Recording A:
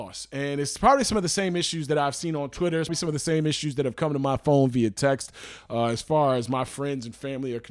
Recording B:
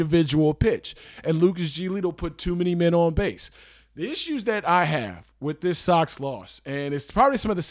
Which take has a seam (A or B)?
A